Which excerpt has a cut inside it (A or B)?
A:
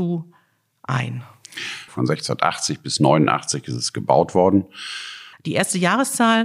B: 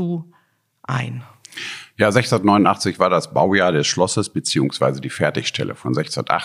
A